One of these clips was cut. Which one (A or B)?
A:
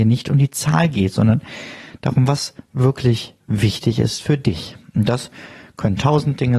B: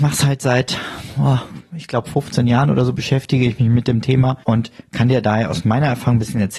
B